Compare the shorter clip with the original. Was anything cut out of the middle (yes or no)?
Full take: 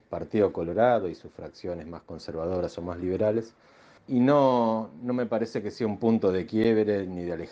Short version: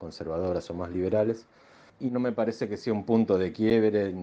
yes